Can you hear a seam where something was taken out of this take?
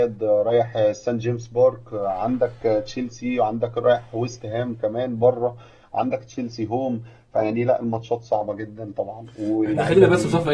no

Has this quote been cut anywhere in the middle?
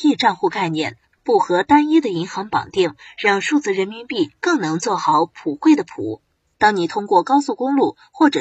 yes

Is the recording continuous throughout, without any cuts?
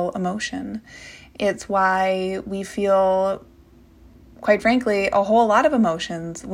yes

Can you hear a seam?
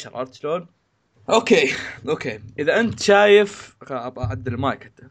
yes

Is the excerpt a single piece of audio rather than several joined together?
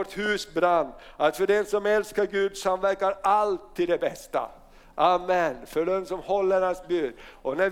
yes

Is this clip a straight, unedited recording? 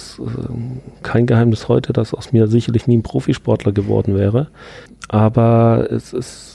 yes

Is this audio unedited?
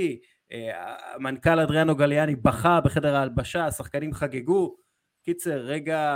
yes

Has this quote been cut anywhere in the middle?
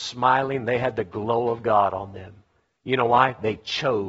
no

